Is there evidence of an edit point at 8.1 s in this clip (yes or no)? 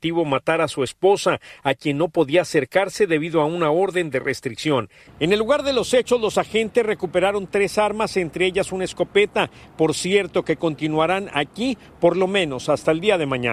no